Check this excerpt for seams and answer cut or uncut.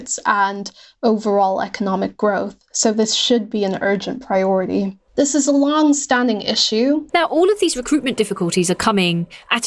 cut